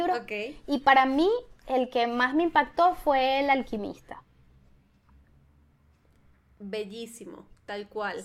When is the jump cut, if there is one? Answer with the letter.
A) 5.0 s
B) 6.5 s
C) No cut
C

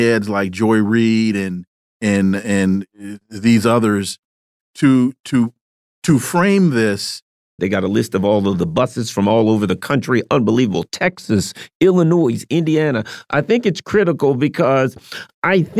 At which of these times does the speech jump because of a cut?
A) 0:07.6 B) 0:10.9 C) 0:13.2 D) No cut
A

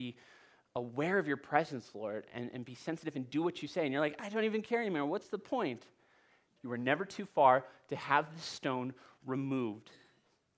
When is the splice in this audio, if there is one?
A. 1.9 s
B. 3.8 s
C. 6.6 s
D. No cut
C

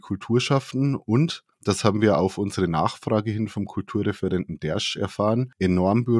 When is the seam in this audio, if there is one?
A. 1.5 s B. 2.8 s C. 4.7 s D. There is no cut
A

